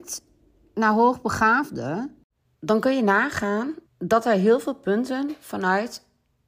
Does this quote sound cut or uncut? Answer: cut